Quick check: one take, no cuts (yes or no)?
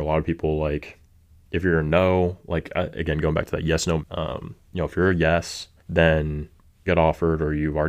no